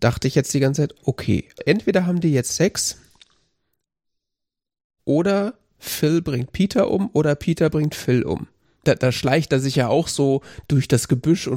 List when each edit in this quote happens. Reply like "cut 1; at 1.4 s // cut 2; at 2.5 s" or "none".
cut 1; at 1.6 s // cut 2; at 8.8 s